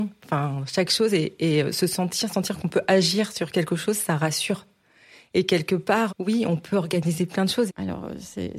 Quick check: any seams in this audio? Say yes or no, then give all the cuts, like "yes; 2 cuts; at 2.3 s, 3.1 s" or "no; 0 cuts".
yes; 2 cuts; at 6.1 s, 7.7 s